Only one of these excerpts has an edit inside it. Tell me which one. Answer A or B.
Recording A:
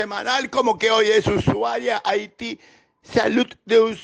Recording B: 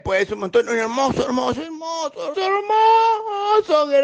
B